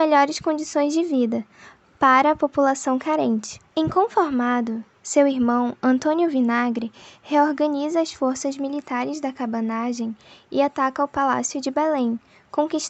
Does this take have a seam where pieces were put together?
yes; 1 cut; at 3.7 s

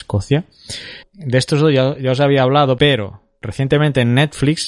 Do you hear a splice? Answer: yes; 2 cuts; at 1.0 s, 2.8 s

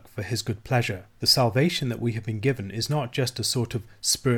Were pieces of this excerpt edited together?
yes; 1 cut; at 1.2 s

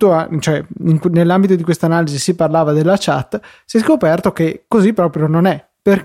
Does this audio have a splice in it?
no; 0 cuts

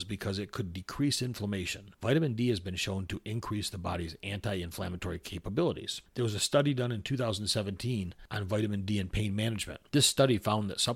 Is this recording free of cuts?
no; 1 cut; at 6.1 s

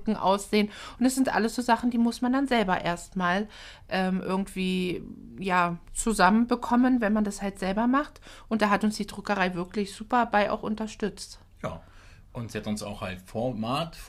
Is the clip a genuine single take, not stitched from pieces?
yes; 0 cuts

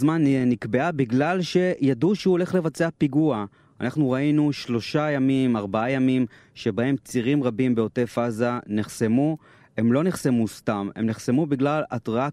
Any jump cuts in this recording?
no; 0 cuts

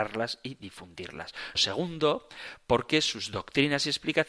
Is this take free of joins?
no; 1 cut; at 1.5 s

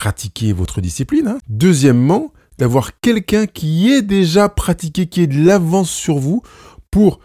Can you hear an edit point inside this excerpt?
yes; 1 cut; at 1.4 s

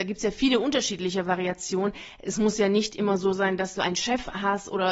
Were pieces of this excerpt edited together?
no; 0 cuts

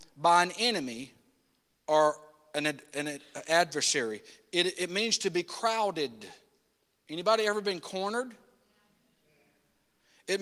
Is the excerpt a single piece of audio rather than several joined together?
yes; 0 cuts

